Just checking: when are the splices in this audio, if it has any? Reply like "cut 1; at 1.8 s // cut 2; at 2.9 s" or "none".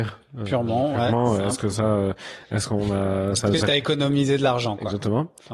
none